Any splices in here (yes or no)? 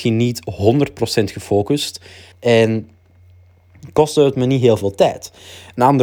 yes